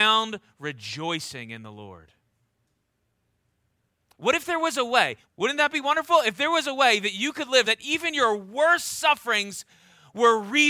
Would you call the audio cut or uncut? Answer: cut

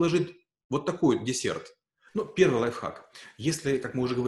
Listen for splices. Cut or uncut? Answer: cut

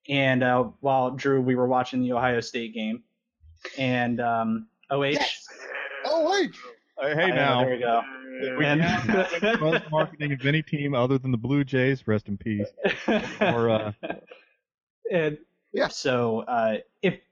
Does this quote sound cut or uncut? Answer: cut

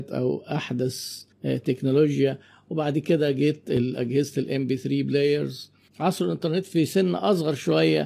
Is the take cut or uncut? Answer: cut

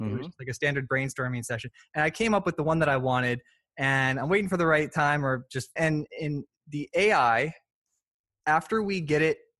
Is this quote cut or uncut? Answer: cut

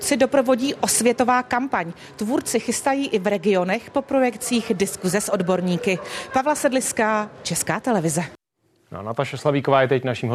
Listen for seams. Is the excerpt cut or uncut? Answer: uncut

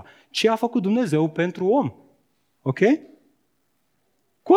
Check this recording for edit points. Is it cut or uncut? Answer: uncut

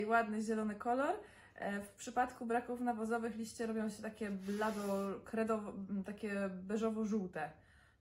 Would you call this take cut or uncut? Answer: uncut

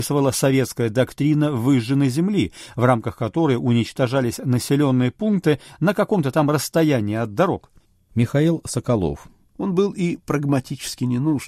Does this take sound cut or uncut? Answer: cut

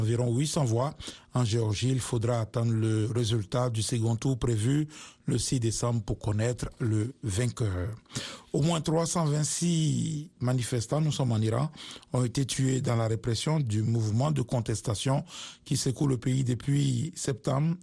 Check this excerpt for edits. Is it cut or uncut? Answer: uncut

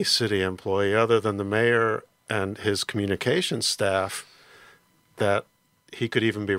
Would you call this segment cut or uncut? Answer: uncut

